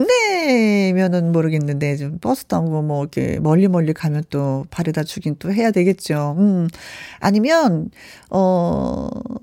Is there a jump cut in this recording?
no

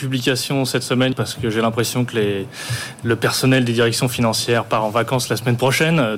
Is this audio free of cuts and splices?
no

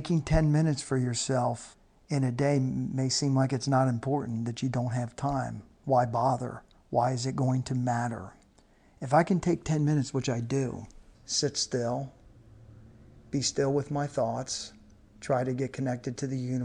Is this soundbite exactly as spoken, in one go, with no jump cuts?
no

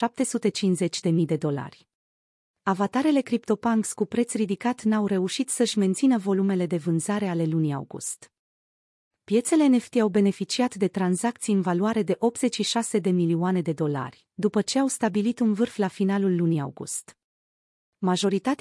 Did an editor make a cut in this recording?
yes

